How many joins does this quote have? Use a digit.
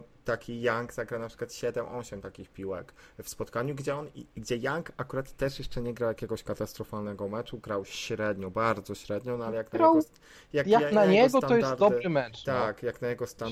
0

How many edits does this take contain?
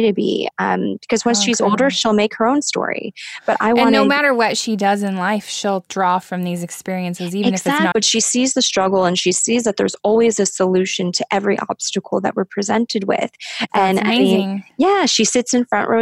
2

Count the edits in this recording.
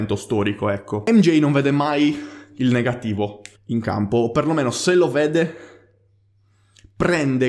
1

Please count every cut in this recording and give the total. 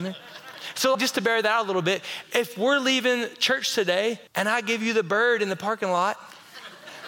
2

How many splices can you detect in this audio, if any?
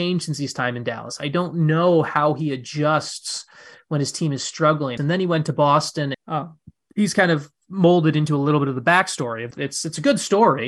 3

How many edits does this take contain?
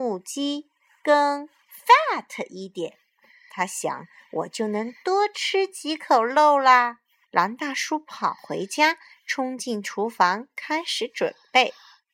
1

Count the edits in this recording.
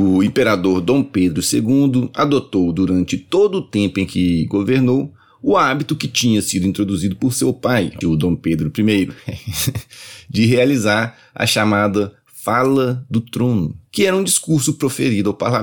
2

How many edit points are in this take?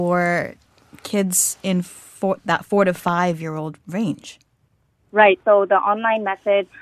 1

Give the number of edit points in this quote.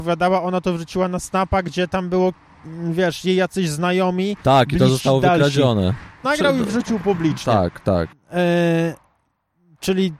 2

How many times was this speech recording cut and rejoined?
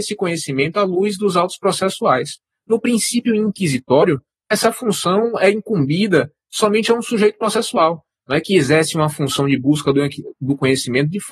1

